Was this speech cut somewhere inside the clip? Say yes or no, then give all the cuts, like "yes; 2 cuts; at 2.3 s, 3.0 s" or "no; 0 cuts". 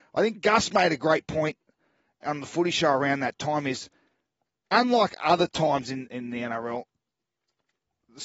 yes; 1 cut; at 6.1 s